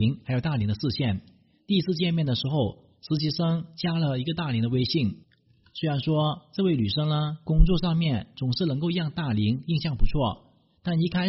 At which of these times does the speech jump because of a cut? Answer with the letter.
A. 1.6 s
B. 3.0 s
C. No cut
C